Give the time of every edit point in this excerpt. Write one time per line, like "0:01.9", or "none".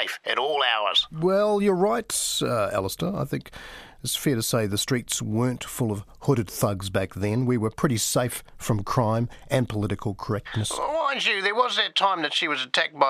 none